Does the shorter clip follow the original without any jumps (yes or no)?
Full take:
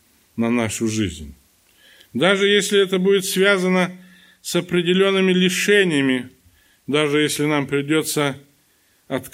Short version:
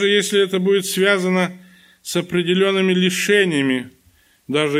yes